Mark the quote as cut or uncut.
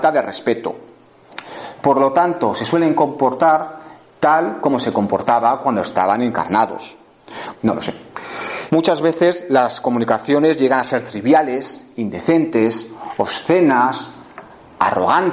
cut